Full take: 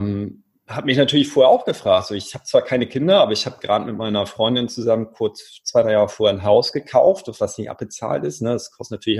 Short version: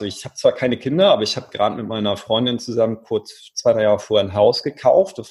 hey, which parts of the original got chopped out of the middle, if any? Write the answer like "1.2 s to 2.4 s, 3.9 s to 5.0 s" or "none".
none